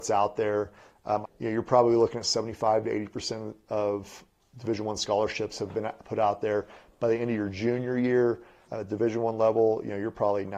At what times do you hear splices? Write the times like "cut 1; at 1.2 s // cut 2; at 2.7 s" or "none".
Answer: cut 1; at 1.2 s // cut 2; at 8.6 s